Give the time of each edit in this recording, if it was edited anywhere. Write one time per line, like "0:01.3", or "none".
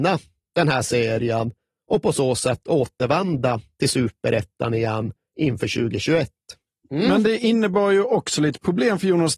0:06.8

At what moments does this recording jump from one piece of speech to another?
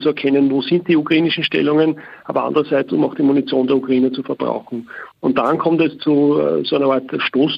none

